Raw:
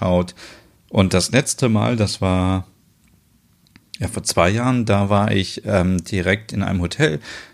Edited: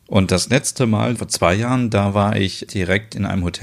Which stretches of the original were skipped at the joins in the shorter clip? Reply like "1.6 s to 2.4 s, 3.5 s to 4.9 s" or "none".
2.0 s to 4.1 s, 5.6 s to 6.0 s